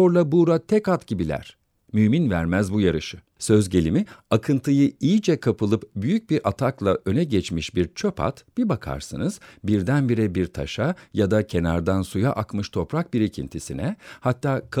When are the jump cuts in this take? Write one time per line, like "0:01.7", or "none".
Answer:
0:03.4